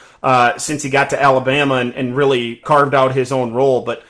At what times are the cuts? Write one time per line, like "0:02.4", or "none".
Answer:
0:02.6